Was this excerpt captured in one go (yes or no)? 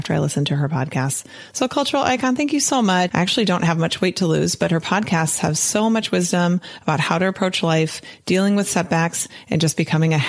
no